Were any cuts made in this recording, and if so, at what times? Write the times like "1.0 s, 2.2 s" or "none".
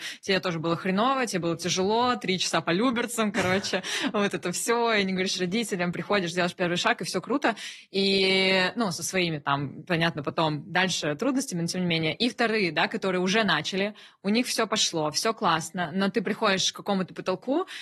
none